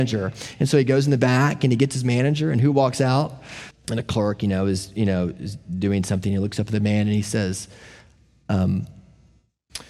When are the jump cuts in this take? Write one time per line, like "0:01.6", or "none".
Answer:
0:03.7